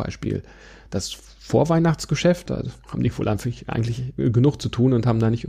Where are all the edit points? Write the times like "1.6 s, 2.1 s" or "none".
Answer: 2.5 s